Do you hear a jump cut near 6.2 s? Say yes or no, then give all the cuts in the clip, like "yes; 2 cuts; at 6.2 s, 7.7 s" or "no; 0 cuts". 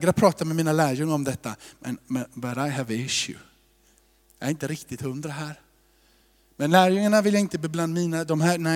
no; 0 cuts